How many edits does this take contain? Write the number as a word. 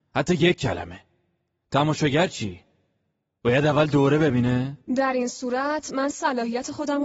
zero